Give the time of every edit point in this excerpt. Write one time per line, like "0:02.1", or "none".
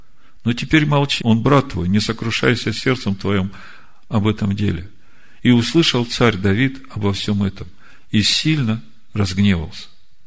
0:01.2
0:05.4